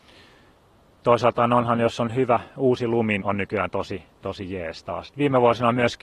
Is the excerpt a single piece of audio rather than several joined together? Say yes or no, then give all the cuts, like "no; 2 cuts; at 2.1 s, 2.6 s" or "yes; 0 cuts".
no; 2 cuts; at 3.2 s, 5.1 s